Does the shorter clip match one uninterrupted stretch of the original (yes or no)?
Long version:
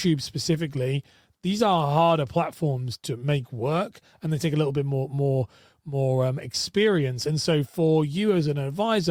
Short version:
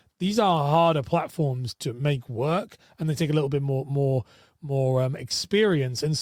yes